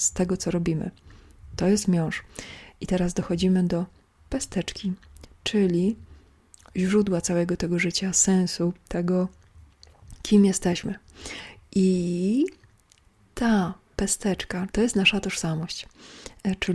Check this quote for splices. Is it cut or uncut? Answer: cut